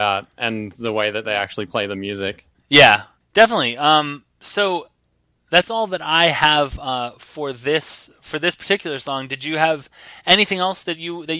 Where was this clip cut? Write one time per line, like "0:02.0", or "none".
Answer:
none